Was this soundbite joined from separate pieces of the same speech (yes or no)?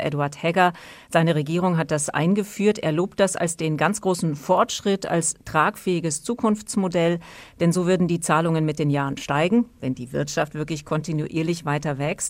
no